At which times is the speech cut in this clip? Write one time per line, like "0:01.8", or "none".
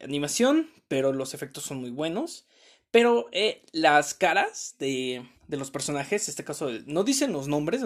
0:05.3